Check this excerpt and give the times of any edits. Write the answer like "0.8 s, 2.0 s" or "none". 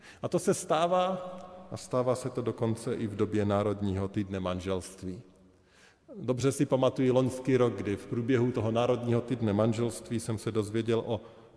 none